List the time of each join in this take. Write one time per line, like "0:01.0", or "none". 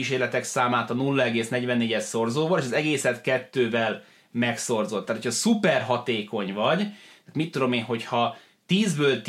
none